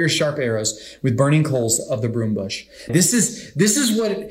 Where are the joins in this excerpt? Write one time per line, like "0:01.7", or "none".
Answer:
0:02.9